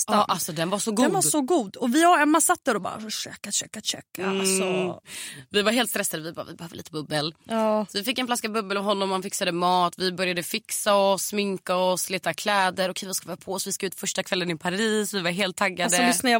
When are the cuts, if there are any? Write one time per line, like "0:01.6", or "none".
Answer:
0:05.0